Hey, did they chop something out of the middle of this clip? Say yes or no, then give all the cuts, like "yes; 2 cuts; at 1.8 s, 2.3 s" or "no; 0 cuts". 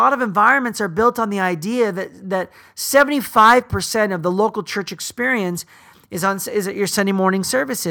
no; 0 cuts